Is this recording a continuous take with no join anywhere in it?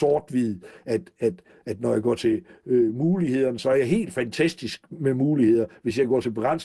yes; 0 cuts

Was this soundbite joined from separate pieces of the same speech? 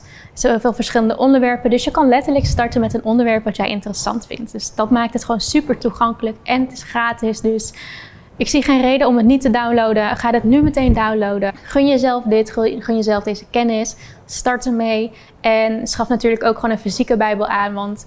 no; 0 cuts

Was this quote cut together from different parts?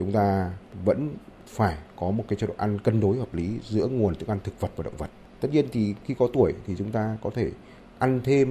no; 0 cuts

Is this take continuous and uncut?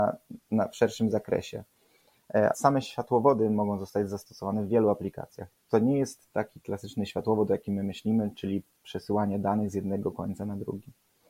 no; 1 cut; at 2.5 s

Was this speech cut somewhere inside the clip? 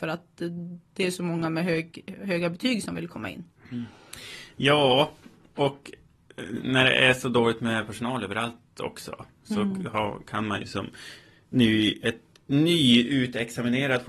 no; 0 cuts

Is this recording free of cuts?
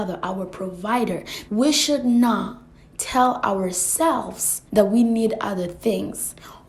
no; 2 cuts; at 1.5 s, 4.7 s

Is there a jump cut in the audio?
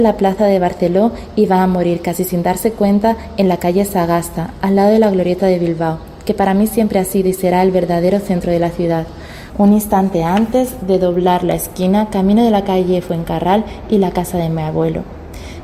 yes; 1 cut; at 9.5 s

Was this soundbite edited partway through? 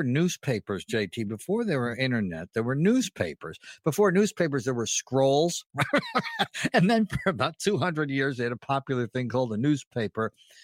no; 0 cuts

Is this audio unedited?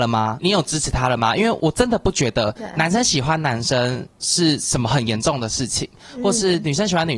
yes; 0 cuts

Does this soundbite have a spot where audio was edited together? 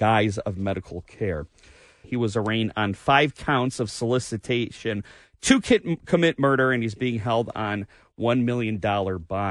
yes; 1 cut; at 2.0 s

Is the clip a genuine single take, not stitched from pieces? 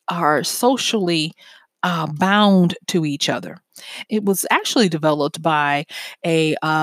no; 1 cut; at 4.1 s

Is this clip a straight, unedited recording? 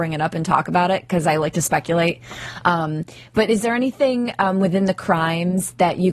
yes; 0 cuts

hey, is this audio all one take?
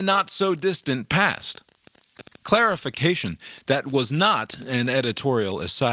yes; 0 cuts

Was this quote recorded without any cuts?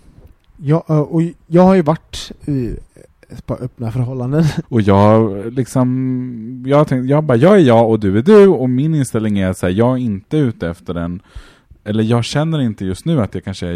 no; 1 cut; at 4.6 s

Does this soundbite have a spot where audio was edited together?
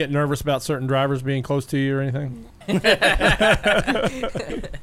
yes; 1 cut; at 2.6 s

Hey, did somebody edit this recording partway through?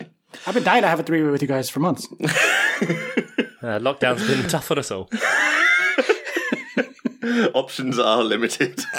no; 0 cuts

